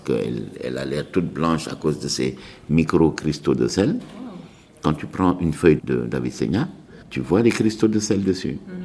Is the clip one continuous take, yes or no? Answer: no